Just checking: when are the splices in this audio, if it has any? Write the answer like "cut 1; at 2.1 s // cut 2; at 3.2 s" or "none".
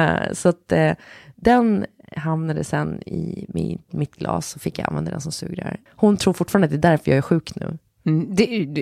cut 1; at 5.9 s